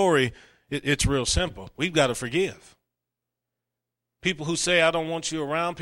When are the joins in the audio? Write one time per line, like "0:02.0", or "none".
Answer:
none